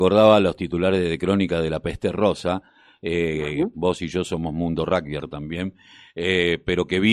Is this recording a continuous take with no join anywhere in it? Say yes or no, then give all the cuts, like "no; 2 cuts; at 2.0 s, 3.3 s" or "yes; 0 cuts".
no; 1 cut; at 3.7 s